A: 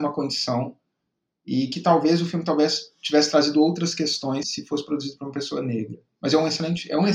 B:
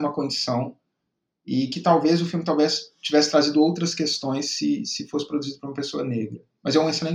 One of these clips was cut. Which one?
A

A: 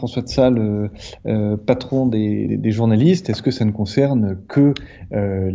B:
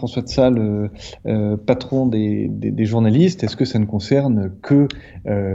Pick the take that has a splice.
A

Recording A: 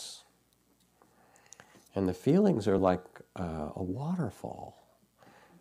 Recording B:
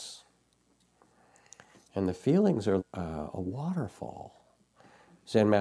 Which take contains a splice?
B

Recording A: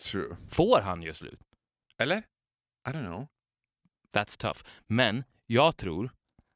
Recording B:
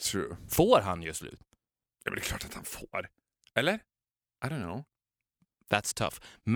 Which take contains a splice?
A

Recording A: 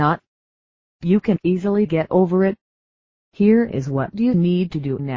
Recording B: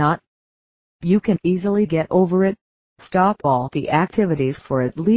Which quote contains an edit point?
B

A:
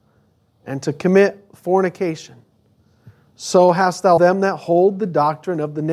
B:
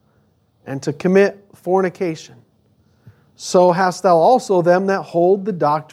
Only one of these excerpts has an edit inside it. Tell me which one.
A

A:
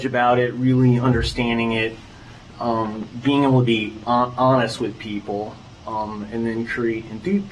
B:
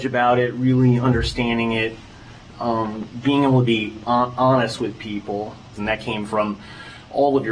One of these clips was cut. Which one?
B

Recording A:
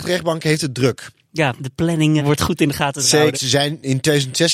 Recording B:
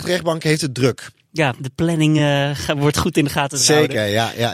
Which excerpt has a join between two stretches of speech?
A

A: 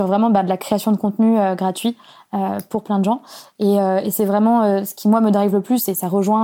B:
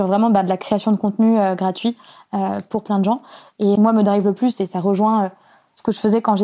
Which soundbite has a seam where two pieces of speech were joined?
B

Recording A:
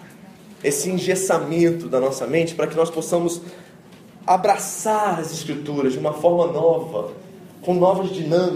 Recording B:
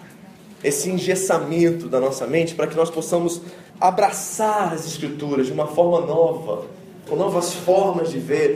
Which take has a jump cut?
B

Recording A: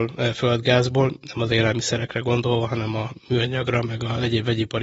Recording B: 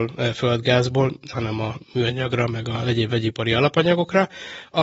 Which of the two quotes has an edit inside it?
B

